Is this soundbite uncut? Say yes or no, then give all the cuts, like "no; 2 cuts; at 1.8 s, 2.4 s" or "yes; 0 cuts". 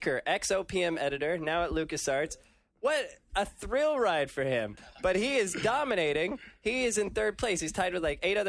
no; 1 cut; at 4.8 s